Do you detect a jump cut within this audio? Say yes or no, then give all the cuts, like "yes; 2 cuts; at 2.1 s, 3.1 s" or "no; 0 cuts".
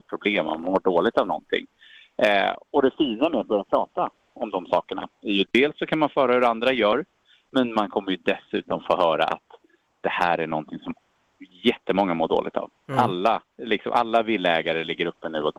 yes; 1 cut; at 13.5 s